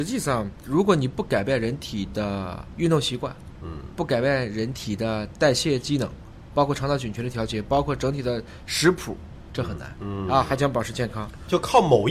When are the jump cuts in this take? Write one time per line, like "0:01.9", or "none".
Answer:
0:09.5